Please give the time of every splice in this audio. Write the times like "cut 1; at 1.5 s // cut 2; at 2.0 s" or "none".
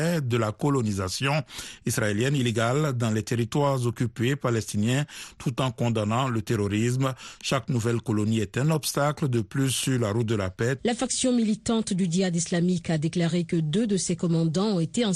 cut 1; at 10.8 s